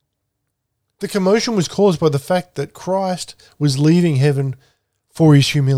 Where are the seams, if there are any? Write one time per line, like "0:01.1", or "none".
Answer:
0:00.9